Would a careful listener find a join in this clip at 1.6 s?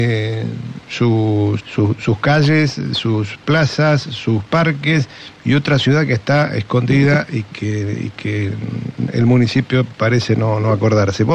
yes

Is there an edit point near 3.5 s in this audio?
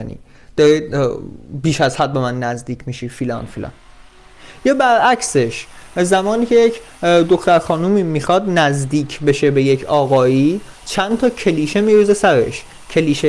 yes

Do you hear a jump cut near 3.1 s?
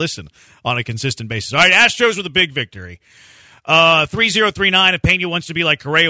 no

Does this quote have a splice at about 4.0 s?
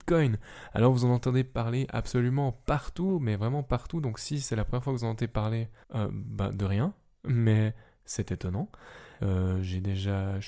no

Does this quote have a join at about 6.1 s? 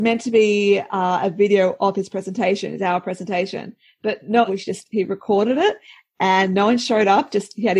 no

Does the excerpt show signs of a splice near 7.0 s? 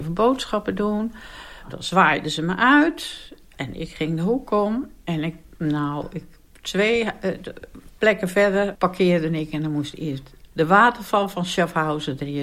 no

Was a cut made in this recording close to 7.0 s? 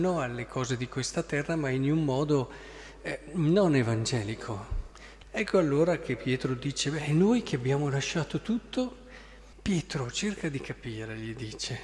no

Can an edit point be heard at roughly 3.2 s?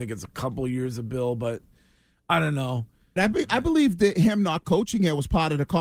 yes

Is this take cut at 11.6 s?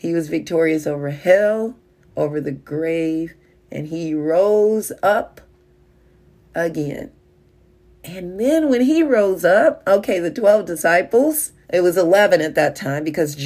yes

